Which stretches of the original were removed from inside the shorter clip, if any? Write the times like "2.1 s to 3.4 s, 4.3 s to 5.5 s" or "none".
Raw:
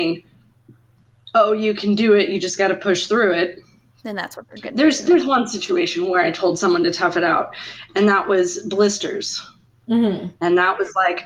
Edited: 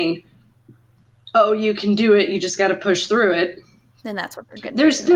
none